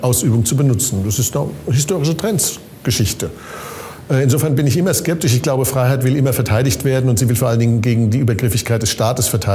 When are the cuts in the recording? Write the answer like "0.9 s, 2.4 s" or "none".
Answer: none